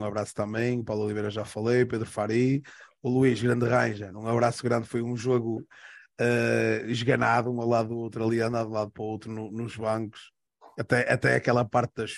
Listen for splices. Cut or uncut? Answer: uncut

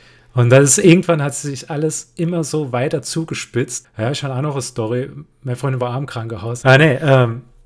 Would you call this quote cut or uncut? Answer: cut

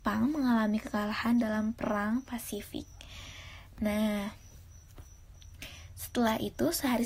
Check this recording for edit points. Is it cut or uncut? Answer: uncut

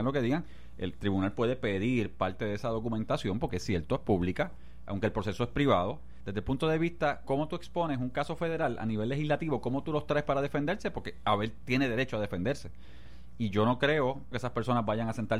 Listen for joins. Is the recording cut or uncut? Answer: cut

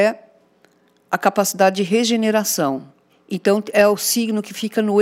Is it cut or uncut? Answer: cut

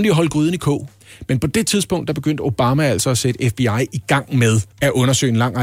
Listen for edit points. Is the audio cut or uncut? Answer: cut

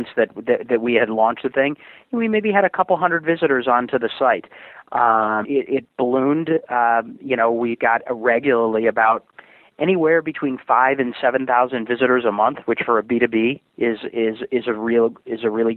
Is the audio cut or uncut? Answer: cut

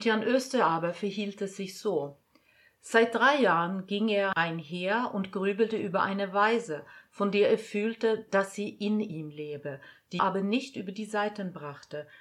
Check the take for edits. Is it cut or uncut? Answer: cut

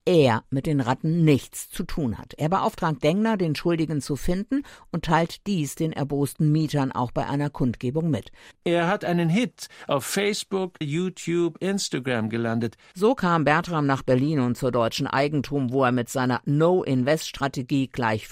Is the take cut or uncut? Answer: cut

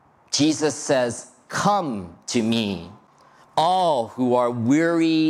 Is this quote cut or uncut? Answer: uncut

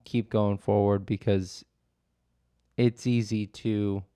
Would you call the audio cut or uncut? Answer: uncut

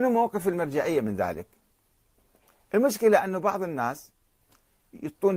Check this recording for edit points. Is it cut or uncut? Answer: uncut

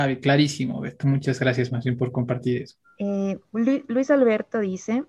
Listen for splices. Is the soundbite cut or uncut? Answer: cut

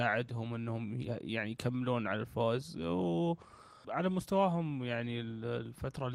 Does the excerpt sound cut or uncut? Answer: cut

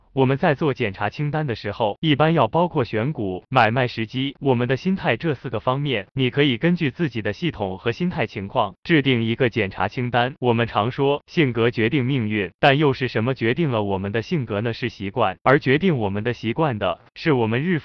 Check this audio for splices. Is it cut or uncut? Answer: cut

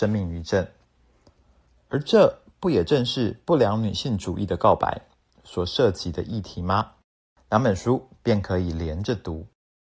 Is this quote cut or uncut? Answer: uncut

